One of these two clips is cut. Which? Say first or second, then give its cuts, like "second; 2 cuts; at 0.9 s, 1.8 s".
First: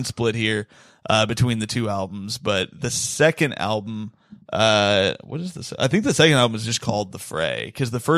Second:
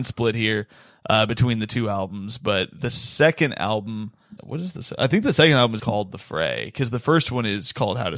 second; 2 cuts; at 4.4 s, 5.8 s